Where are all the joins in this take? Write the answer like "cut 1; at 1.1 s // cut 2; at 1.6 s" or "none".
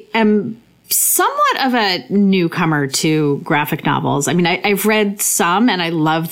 none